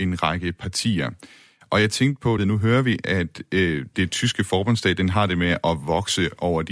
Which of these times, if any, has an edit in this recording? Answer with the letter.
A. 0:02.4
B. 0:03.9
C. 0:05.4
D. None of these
A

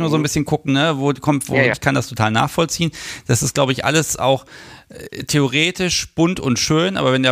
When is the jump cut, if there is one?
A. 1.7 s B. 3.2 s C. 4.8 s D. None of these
A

